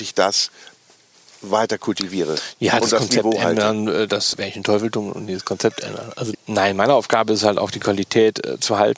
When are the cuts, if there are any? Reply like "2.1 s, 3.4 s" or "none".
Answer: 4.3 s, 6.3 s